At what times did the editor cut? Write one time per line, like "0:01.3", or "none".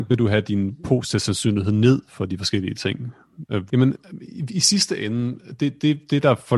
0:03.7